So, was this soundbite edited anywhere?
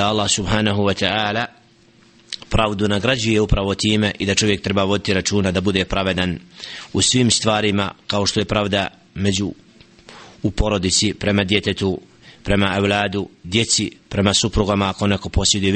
no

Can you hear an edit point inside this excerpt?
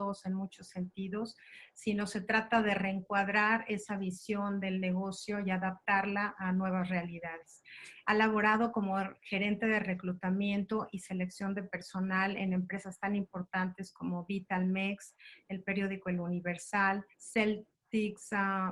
yes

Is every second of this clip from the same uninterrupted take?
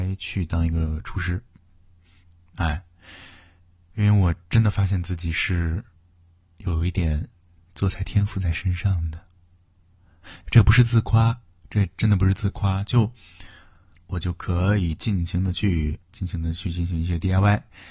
no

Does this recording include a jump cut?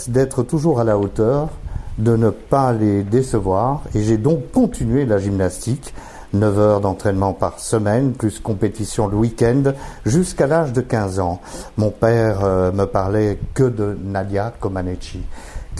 no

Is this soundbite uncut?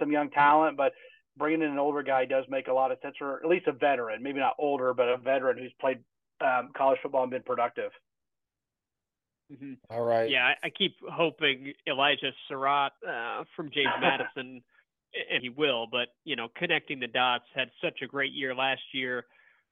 no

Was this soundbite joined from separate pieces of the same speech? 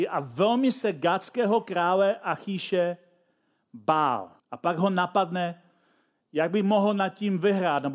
yes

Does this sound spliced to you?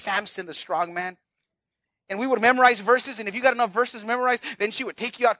no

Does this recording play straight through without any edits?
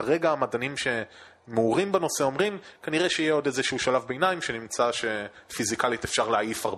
yes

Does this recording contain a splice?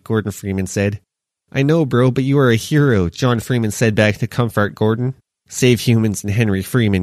no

